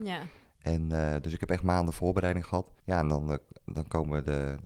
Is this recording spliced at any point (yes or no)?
yes